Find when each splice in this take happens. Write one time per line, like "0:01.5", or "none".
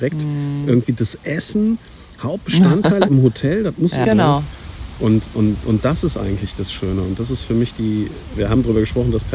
0:04.0
0:08.3